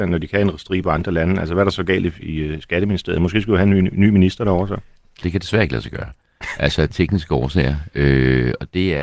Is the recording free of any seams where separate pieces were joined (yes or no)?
no